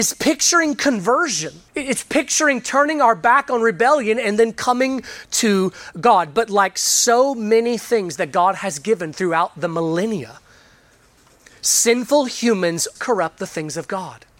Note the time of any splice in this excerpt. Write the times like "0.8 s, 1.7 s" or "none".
1.7 s, 13.0 s